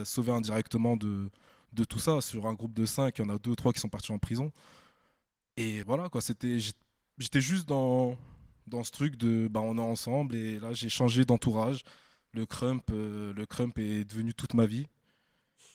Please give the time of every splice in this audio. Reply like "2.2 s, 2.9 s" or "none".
5.8 s

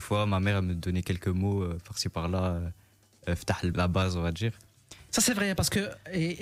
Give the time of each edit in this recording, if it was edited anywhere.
3.7 s, 5.1 s

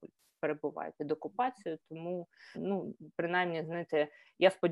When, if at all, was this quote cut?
2.5 s

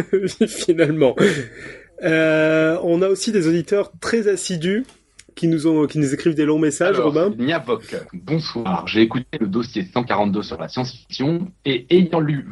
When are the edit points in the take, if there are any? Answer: 8.1 s

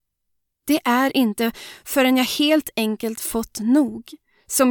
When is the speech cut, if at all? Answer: none

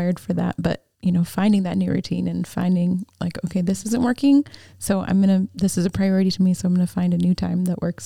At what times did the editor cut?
0.9 s

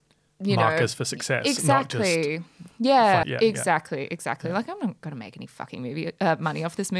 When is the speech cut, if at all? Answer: 3.2 s

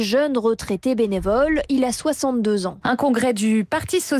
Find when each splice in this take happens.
2.8 s

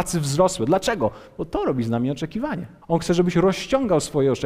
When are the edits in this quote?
2.8 s

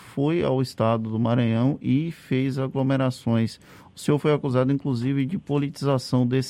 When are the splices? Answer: none

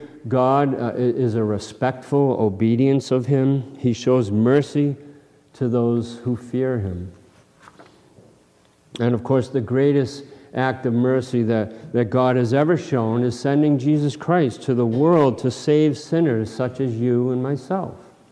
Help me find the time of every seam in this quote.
none

